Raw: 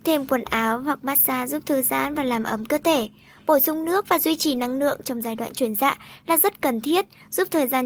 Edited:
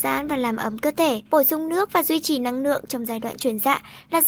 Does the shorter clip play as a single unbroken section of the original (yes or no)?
no